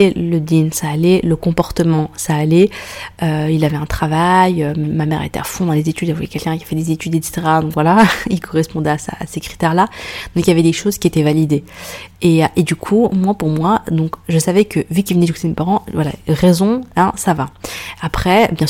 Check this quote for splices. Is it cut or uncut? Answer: uncut